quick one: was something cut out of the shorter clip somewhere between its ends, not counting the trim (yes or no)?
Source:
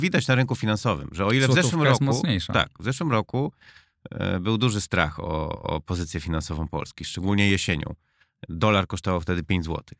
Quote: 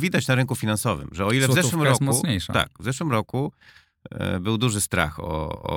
no